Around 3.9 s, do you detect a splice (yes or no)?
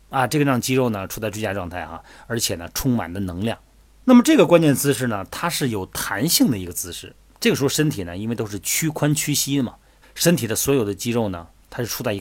yes